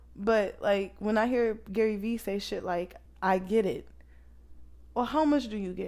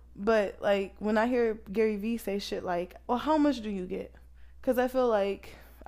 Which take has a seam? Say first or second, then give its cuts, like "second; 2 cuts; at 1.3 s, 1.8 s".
second; 1 cut; at 3.1 s